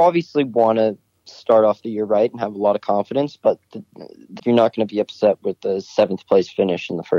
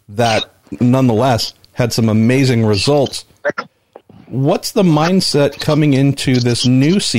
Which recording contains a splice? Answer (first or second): first